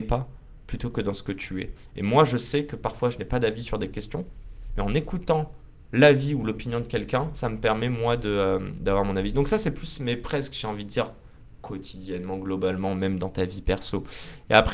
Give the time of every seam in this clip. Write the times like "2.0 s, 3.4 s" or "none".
4.7 s